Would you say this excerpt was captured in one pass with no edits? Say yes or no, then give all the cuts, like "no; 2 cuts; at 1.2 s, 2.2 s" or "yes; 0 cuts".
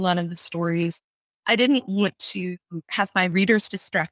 yes; 0 cuts